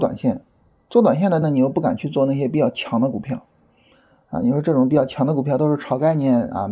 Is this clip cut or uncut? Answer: cut